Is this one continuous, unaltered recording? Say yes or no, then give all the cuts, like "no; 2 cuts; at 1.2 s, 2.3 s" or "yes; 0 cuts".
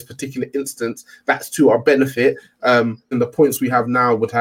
no; 1 cut; at 3.1 s